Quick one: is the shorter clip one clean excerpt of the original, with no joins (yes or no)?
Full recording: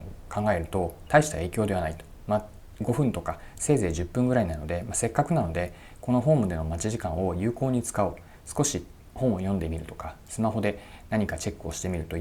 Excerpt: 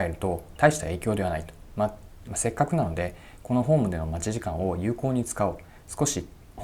no